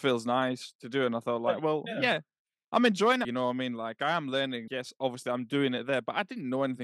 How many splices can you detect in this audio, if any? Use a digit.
2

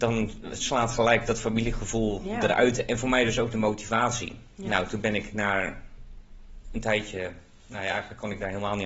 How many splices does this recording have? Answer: 0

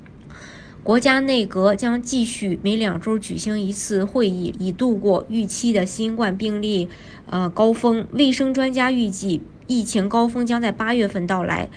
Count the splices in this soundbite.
1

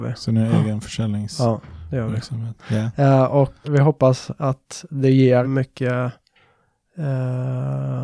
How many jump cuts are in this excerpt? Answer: 3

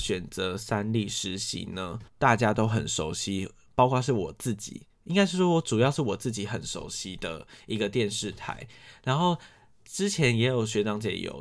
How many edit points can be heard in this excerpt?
1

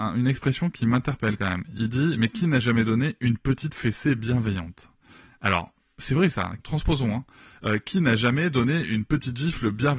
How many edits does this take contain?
1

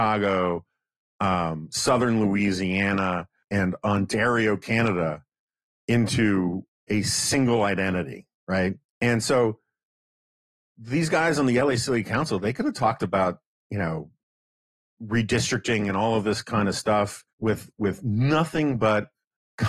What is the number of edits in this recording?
2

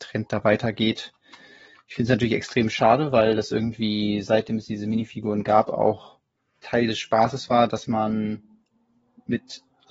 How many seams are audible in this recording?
0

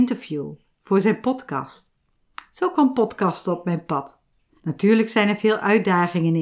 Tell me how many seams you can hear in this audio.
0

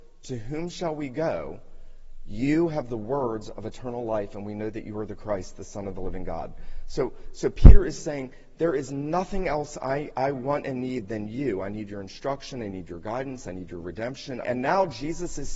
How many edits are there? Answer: 1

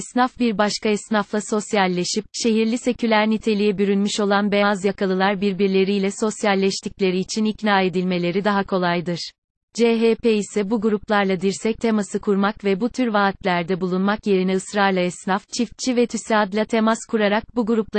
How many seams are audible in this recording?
2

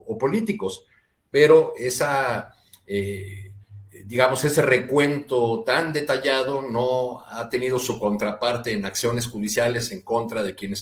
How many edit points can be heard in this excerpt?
0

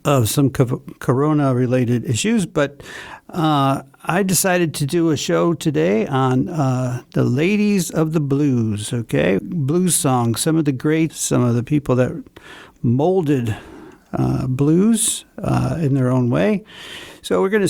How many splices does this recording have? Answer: 2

